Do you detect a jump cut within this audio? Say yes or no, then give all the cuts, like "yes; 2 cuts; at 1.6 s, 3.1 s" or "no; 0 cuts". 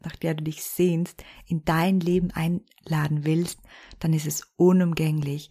no; 0 cuts